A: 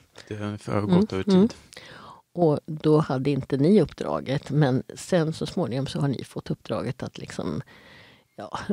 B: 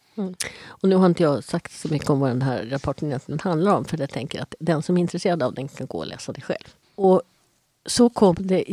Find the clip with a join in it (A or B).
B